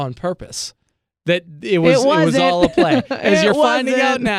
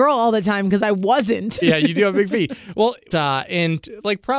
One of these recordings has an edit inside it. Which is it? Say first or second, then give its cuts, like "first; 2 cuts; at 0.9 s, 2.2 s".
second; 2 cuts; at 1.6 s, 3.1 s